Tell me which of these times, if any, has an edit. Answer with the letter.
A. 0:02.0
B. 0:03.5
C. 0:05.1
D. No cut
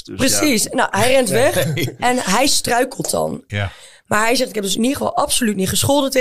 B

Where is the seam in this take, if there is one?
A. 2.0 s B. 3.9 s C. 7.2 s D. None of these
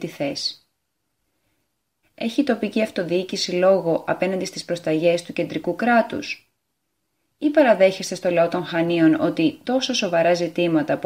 A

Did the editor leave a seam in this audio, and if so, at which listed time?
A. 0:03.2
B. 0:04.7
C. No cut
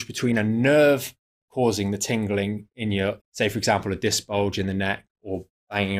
A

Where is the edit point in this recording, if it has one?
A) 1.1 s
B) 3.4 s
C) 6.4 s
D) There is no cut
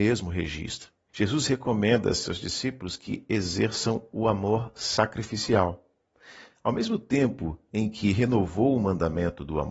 A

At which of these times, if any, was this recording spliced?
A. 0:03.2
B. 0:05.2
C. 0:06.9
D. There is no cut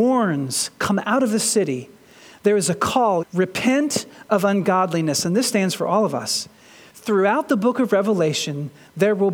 A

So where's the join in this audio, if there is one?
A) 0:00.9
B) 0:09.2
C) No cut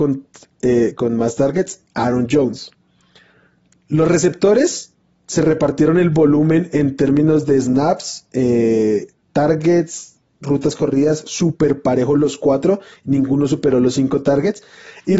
C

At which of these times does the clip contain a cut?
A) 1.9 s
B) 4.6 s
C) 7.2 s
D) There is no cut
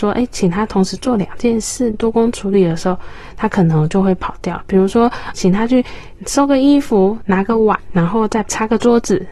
D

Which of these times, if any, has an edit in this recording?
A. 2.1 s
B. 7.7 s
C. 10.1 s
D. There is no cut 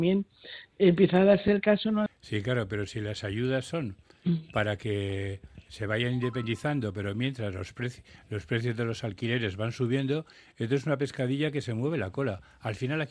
A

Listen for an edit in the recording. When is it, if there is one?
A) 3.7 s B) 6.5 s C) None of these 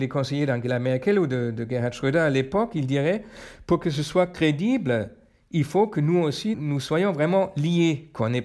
B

